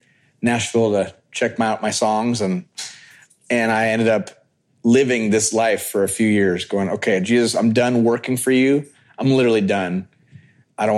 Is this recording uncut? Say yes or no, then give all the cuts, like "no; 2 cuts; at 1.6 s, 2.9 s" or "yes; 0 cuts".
yes; 0 cuts